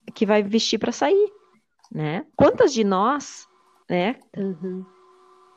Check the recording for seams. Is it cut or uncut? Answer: cut